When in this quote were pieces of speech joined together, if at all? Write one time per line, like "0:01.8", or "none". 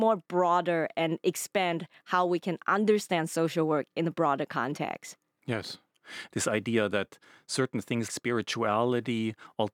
0:06.3
0:08.1